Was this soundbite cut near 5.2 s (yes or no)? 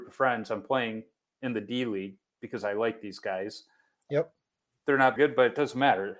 yes